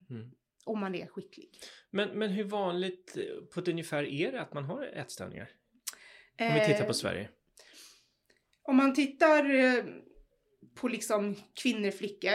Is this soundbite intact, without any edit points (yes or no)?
yes